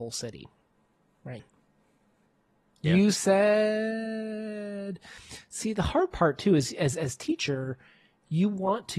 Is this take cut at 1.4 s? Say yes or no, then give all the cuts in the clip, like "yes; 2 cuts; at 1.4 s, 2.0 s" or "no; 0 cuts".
yes; 1 cut; at 1.4 s